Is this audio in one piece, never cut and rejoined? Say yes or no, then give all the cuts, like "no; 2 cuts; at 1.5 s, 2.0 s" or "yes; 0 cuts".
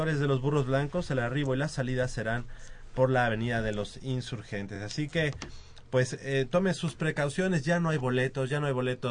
yes; 0 cuts